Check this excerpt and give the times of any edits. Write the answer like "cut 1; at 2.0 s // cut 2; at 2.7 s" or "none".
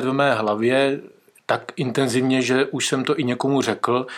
none